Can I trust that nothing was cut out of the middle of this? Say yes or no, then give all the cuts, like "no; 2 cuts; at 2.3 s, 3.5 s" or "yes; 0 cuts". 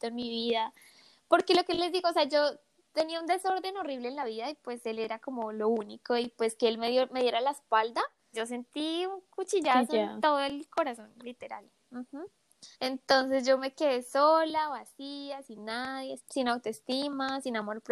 no; 3 cuts; at 8.3 s, 12.7 s, 16.2 s